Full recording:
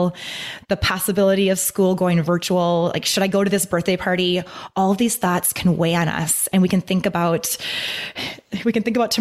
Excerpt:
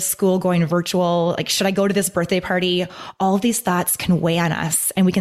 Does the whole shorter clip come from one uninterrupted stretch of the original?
yes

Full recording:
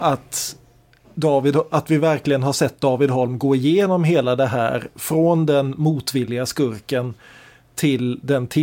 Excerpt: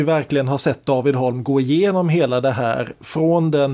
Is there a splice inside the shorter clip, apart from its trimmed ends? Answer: no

